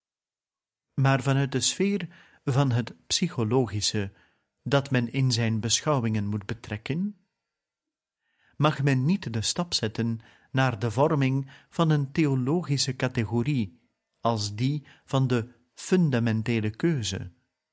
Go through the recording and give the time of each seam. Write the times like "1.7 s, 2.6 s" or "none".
none

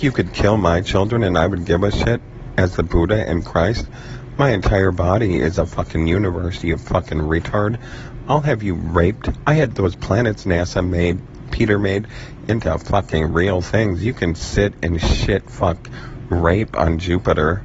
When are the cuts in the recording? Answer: none

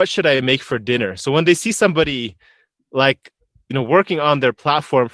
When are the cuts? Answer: none

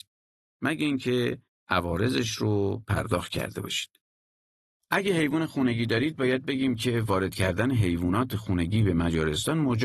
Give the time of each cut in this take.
none

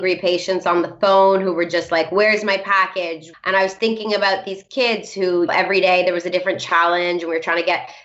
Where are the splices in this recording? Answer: 3.3 s, 5.5 s

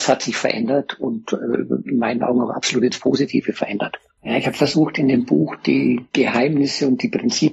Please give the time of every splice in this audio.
4.2 s

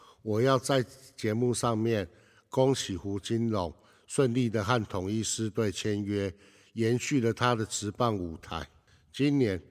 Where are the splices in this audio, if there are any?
none

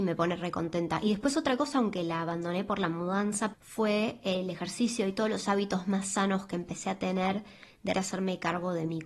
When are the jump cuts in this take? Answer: 3.5 s, 7.9 s

